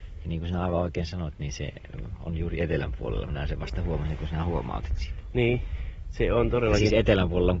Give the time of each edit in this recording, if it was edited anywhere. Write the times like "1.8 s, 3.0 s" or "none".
none